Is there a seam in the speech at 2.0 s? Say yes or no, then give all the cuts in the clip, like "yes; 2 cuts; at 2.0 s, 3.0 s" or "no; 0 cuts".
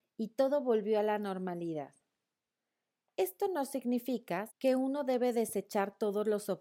no; 1 cut; at 4.5 s